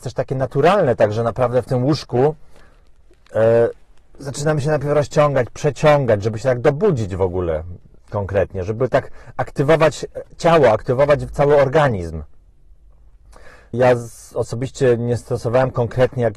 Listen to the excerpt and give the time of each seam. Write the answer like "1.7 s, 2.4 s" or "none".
13.7 s